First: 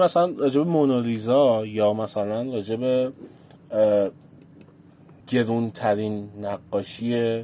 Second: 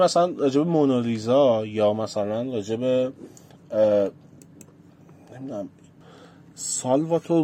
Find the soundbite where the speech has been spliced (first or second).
first